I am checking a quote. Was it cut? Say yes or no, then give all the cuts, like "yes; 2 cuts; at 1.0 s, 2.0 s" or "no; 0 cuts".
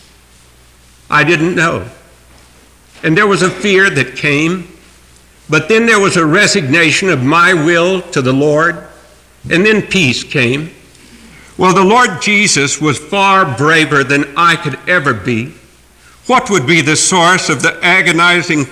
no; 0 cuts